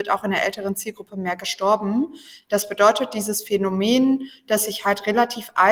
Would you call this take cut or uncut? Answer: uncut